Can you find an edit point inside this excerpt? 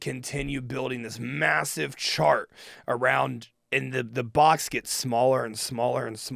no; 0 cuts

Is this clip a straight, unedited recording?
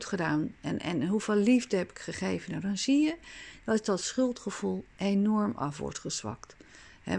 yes; 0 cuts

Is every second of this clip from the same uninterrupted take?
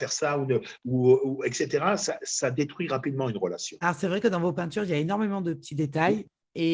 yes; 0 cuts

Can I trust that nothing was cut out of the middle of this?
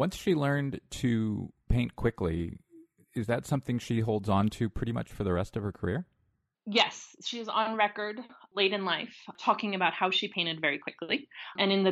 yes; 0 cuts

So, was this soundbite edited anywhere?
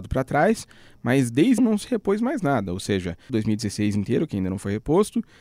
yes; 2 cuts; at 1.6 s, 3.3 s

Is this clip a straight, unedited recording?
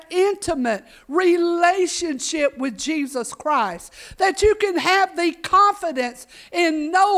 yes; 0 cuts

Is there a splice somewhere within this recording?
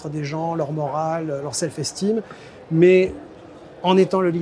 no; 0 cuts

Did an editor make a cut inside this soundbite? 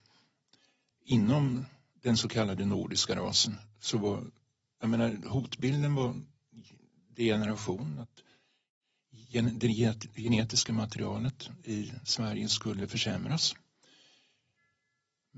no; 0 cuts

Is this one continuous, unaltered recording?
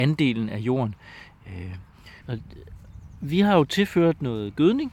no; 1 cut; at 2.2 s

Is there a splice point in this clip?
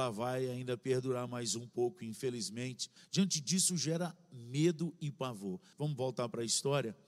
yes; 2 cuts; at 3.0 s, 5.7 s

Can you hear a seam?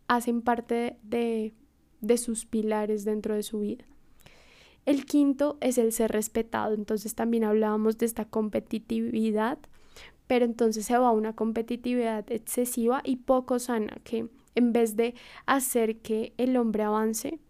no; 0 cuts

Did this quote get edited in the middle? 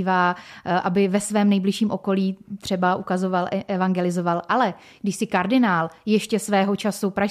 no; 0 cuts

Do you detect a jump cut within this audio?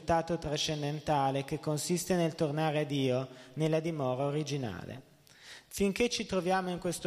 yes; 1 cut; at 5.6 s

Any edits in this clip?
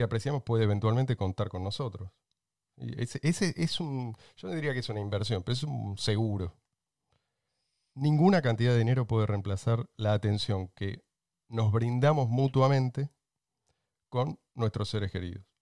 no; 0 cuts

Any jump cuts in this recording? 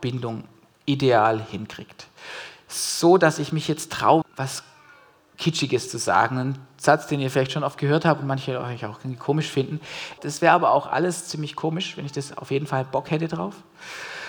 yes; 2 cuts; at 4.2 s, 10.2 s

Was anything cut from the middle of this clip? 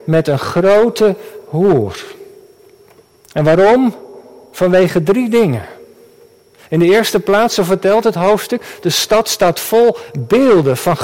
no; 0 cuts

